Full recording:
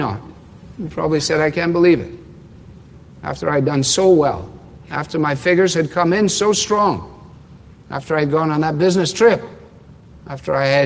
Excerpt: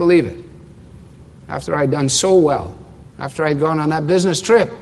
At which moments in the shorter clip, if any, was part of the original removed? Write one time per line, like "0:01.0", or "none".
0:03.1